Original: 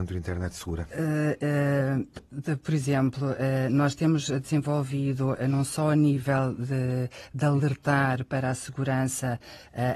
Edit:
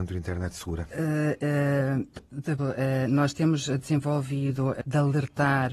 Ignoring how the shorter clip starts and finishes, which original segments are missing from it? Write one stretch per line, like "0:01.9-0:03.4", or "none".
0:02.6-0:03.2
0:05.4-0:07.3